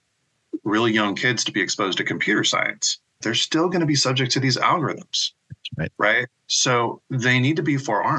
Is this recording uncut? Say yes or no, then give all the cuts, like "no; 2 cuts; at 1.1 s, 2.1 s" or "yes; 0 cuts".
no; 1 cut; at 3.2 s